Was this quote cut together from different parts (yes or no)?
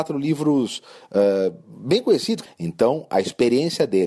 yes